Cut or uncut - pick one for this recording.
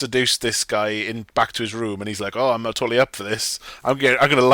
uncut